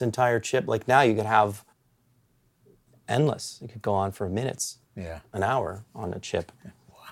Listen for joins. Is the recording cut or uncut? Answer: uncut